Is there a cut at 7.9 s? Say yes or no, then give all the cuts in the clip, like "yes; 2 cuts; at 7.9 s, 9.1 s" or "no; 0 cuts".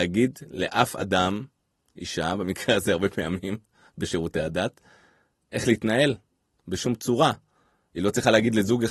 no; 0 cuts